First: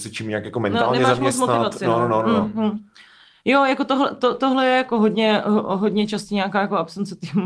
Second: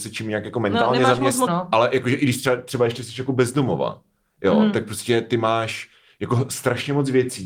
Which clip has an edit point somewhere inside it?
second; 1 cut; at 1.5 s

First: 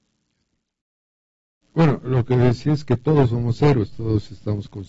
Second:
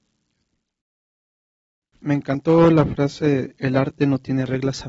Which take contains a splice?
first; 1 cut; at 1.6 s

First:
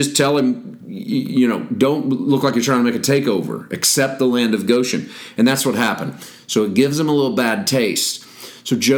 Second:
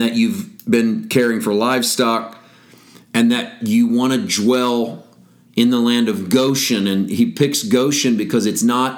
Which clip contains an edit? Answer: first; 1 cut; at 6.4 s

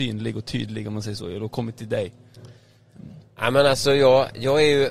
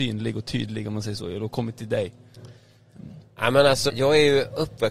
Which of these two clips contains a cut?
second; 1 cut; at 3.9 s

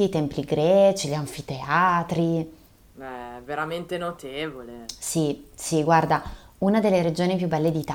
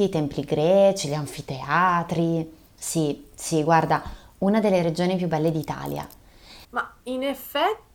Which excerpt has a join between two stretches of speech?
second; 2 cuts; at 2.8 s, 6.6 s

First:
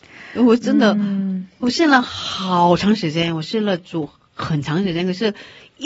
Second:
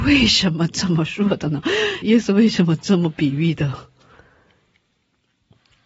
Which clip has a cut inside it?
second; 1 cut; at 2.0 s

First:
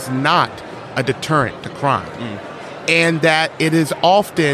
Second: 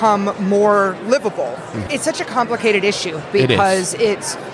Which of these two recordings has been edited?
second; 1 cut; at 1.9 s

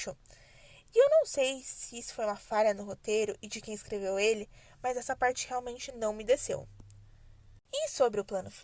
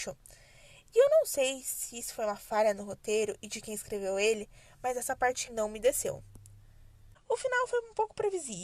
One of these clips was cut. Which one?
second; 2 cuts; at 5.5 s, 7.1 s

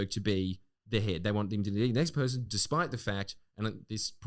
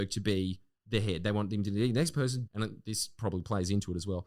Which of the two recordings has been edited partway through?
second; 1 cut; at 2.5 s

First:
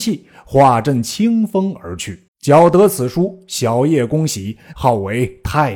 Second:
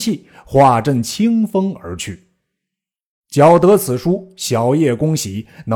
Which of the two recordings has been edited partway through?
first; 2 cuts; at 2.3 s, 4.7 s

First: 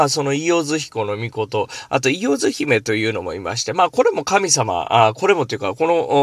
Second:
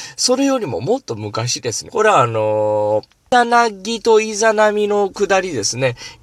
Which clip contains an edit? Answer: second; 2 cuts; at 1.9 s, 3.3 s

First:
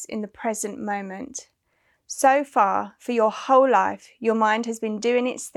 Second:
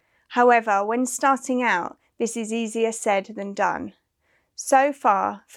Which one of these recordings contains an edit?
first; 1 cut; at 2.0 s

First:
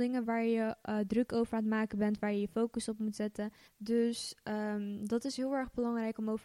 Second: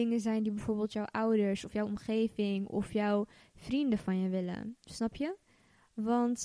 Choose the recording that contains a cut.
first; 1 cut; at 3.7 s

